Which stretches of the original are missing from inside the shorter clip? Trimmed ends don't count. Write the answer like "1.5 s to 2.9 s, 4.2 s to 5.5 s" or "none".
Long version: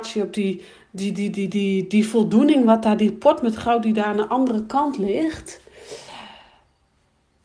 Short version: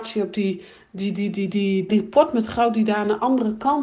1.9 s to 3.0 s